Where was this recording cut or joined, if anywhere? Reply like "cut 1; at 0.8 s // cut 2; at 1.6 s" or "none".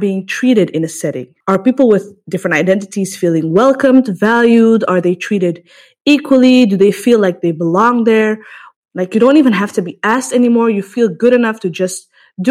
cut 1; at 8.7 s